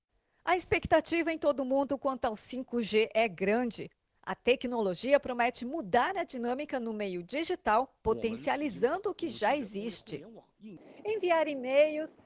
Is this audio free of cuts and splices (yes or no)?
yes